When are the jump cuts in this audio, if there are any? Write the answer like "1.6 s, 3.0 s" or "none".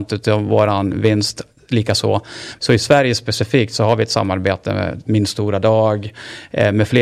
2.6 s, 5.0 s